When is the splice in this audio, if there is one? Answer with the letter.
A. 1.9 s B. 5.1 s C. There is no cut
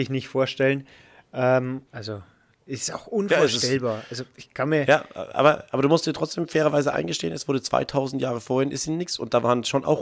A